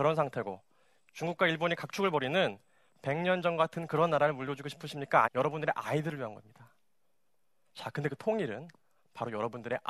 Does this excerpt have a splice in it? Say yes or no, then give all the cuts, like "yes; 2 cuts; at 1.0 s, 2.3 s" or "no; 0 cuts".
yes; 1 cut; at 5.2 s